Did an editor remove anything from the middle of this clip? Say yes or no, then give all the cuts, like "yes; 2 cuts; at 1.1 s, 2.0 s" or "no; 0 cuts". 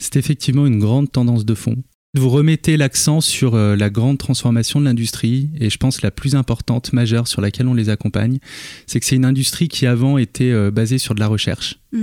no; 0 cuts